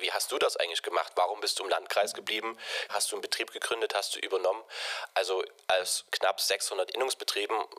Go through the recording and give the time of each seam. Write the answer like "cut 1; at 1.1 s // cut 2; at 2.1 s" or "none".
cut 1; at 2.9 s